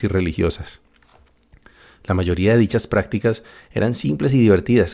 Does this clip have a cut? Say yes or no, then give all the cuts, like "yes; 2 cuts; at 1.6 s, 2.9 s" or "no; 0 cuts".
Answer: no; 0 cuts